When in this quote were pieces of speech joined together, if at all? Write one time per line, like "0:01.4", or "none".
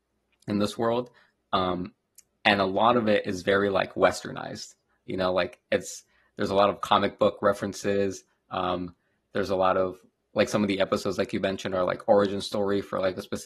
none